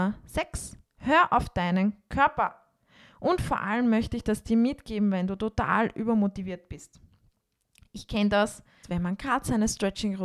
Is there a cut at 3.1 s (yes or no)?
no